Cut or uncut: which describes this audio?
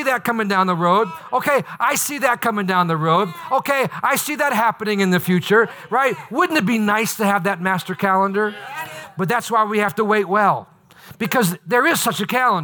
uncut